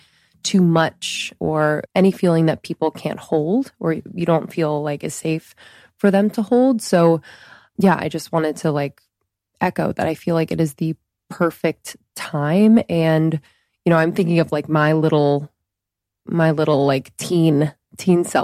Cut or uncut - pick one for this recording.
cut